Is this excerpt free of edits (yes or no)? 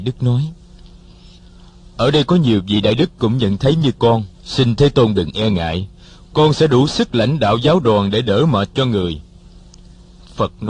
no